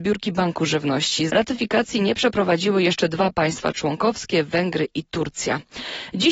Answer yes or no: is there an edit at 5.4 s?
no